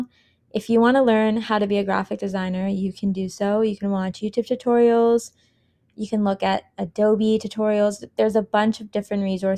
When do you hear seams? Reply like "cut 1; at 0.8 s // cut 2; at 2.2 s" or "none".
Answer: none